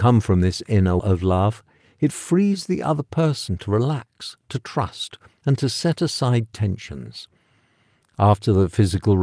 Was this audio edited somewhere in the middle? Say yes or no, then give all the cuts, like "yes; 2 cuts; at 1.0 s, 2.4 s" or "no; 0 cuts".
yes; 2 cuts; at 1.0 s, 8.0 s